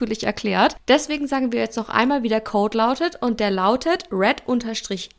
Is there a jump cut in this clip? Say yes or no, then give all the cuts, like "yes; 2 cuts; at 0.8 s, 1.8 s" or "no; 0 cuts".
no; 0 cuts